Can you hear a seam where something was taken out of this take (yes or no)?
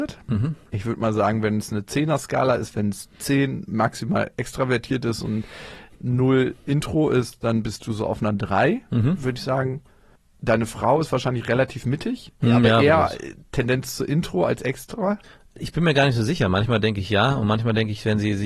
no